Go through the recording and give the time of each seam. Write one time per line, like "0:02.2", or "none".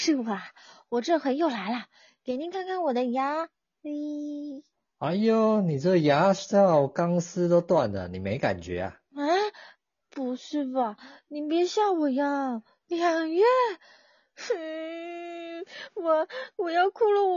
0:12.8